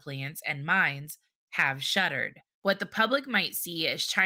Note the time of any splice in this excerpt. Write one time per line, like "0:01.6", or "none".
0:02.6